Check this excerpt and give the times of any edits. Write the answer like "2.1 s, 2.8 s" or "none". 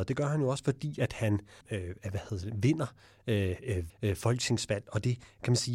1.6 s, 3.9 s